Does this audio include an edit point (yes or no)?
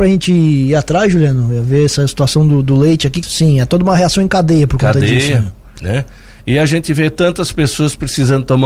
yes